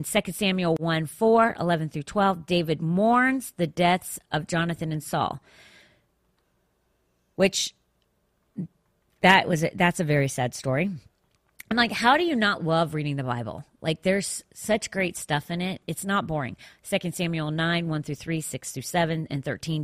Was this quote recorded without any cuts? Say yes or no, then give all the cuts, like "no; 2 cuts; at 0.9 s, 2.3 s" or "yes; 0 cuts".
yes; 0 cuts